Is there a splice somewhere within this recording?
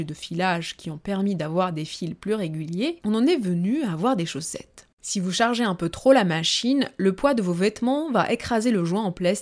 yes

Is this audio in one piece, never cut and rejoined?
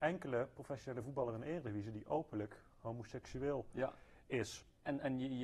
yes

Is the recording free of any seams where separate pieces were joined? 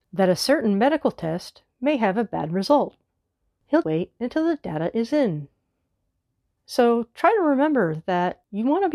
no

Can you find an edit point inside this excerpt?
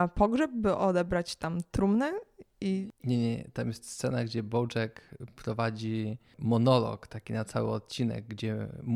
no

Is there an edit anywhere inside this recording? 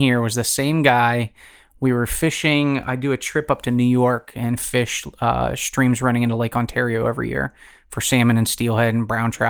no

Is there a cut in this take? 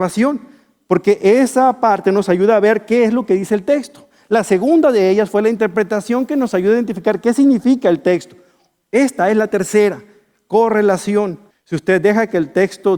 yes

